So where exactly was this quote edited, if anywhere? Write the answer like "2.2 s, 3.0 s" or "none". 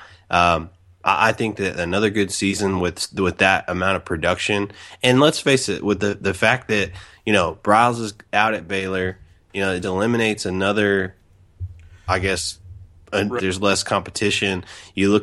9.8 s, 13.4 s